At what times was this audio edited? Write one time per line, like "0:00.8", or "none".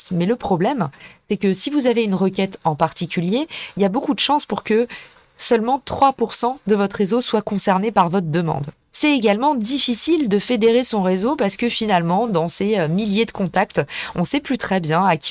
none